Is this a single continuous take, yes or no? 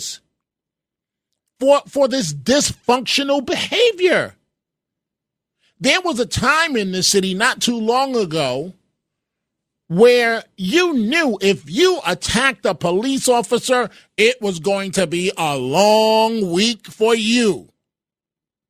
yes